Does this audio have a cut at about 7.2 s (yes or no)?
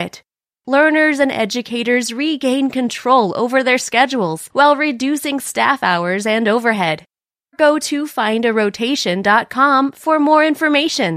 no